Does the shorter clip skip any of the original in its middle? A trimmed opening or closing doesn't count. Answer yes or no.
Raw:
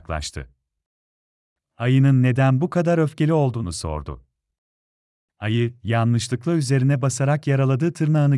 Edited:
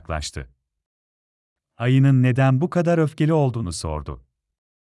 no